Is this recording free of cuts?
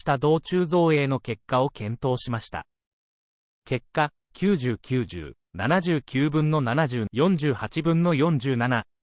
no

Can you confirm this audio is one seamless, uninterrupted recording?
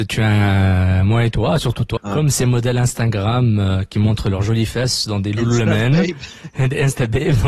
no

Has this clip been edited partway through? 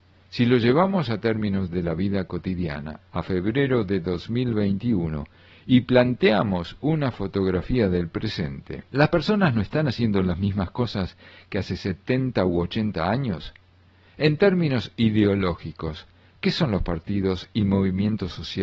yes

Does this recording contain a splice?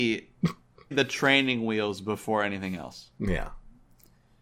yes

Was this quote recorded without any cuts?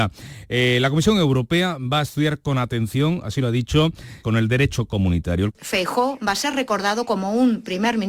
no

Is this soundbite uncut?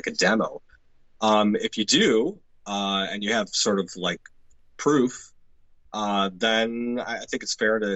yes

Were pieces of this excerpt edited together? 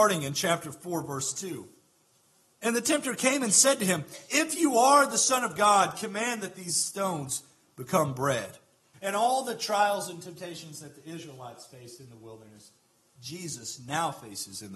yes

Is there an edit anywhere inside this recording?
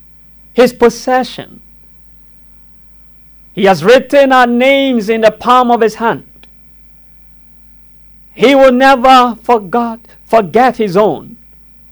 no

